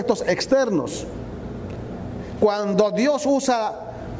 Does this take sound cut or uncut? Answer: cut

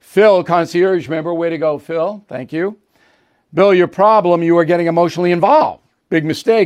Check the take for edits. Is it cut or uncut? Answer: uncut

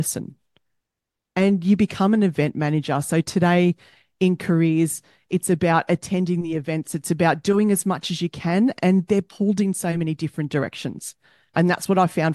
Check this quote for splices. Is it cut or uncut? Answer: uncut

